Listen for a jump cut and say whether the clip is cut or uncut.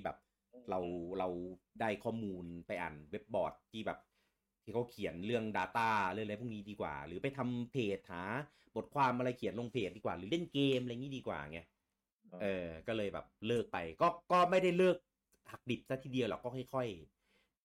cut